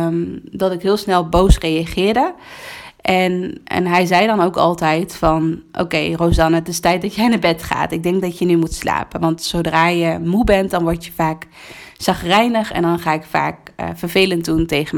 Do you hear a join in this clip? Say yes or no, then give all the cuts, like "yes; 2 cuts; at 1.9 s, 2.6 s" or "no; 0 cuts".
no; 0 cuts